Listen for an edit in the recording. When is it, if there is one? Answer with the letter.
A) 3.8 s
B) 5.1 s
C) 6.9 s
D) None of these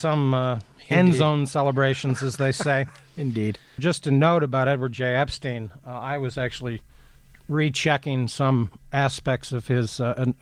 A